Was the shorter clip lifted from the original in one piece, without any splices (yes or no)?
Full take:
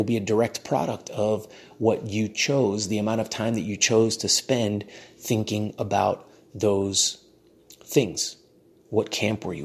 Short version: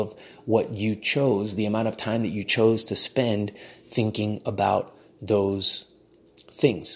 yes